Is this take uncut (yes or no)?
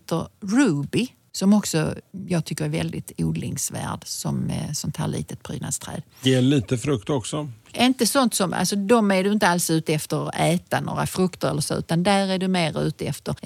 yes